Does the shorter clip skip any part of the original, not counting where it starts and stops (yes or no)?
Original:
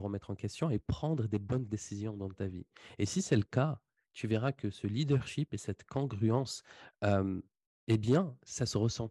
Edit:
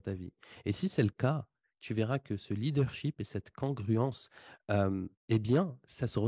yes